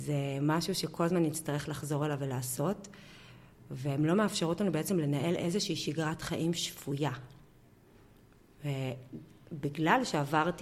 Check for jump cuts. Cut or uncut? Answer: uncut